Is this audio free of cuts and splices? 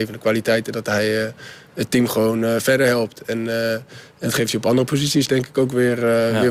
yes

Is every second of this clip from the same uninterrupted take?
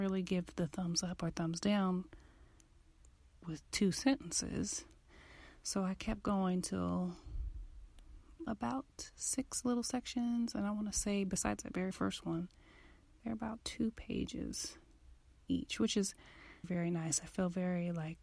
no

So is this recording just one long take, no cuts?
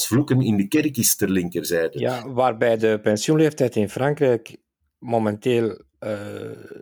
yes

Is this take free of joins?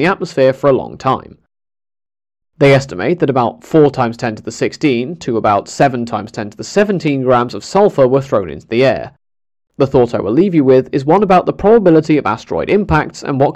no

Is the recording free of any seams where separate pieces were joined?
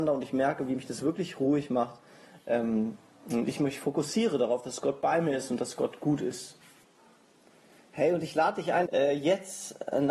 no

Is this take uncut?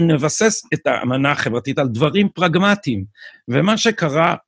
no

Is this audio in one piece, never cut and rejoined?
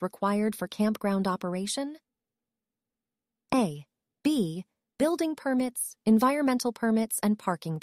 no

